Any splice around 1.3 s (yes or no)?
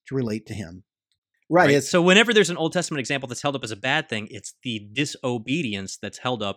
yes